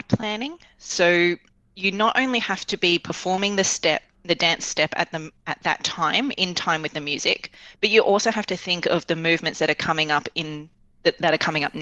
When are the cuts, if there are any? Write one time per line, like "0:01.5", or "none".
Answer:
none